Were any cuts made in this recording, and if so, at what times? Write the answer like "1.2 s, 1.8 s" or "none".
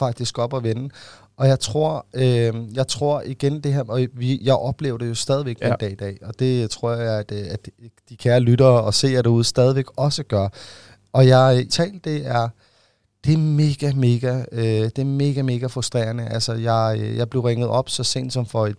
11.7 s